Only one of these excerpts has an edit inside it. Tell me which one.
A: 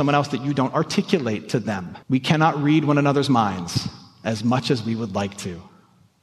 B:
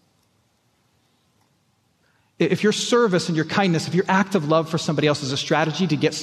A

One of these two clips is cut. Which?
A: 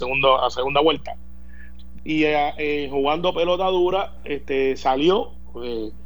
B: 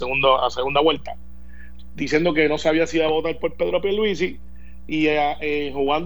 A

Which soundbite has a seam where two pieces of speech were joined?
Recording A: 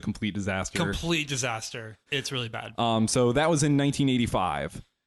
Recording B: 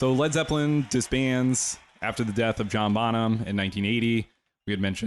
A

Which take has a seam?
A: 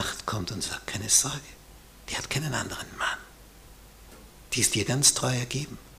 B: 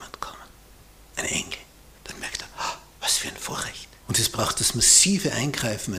B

